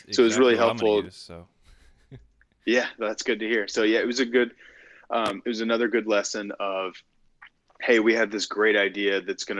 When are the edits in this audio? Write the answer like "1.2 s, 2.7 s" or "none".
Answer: none